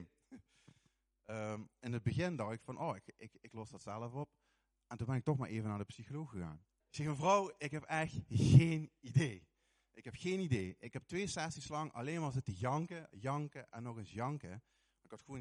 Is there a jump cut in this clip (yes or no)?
yes